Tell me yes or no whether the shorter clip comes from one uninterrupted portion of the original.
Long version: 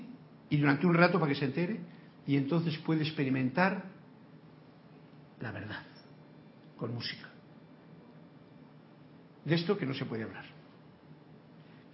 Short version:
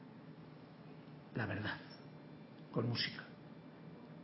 yes